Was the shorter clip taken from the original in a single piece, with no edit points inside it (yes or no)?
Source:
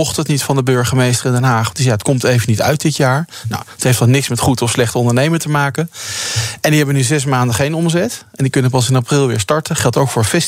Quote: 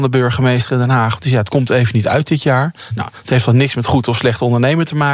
yes